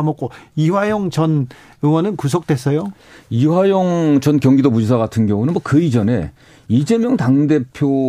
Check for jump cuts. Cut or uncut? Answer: uncut